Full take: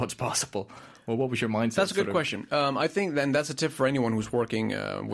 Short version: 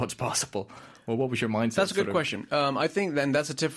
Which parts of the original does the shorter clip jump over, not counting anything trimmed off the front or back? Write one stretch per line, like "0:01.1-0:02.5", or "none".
none